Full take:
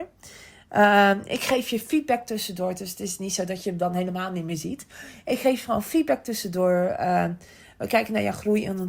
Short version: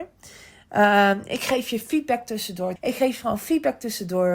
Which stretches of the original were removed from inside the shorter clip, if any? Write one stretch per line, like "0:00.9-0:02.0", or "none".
0:02.8-0:05.2

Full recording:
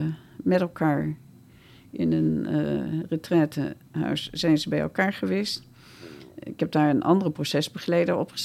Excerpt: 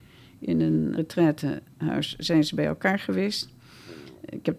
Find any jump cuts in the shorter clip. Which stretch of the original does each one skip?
0:02.5-0:03.1

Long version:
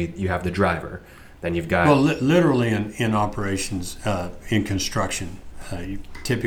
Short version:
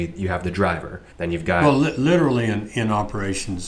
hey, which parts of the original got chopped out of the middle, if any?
0:01.1-0:01.3

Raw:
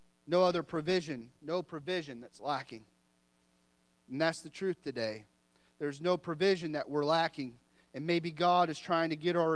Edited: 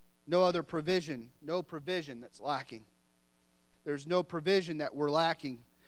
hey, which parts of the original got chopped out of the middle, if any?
0:03.7-0:05.7

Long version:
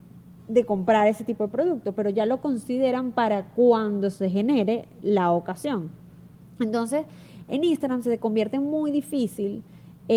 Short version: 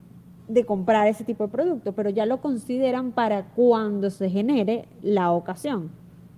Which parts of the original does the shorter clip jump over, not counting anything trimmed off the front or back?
none

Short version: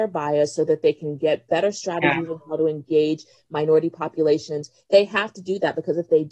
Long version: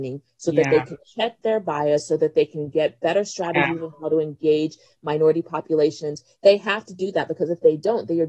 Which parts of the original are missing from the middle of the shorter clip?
none

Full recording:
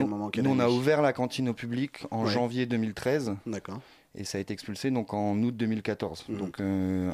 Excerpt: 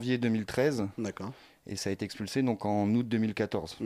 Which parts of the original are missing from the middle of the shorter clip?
none

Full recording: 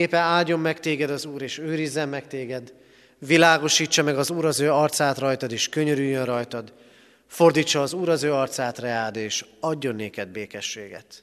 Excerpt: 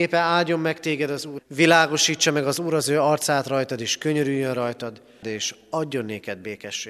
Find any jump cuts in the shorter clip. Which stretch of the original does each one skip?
0:01.4-0:03.1
0:06.9-0:09.1

